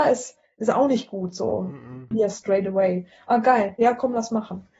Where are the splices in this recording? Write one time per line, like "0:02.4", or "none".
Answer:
0:02.1